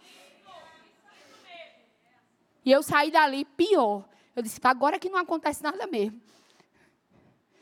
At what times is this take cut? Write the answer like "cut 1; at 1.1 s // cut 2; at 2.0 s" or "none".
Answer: cut 1; at 2.6 s // cut 2; at 4.6 s